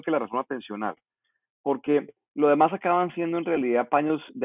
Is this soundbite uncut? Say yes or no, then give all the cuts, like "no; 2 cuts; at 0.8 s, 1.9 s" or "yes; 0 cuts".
yes; 0 cuts